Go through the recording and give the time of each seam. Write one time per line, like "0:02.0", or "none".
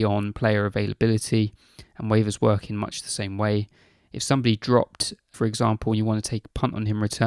0:05.3